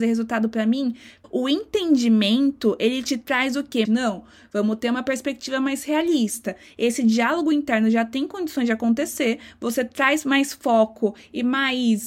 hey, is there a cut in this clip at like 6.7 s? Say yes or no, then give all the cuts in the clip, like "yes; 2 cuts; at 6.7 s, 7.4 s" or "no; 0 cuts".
no; 2 cuts; at 1.2 s, 3.8 s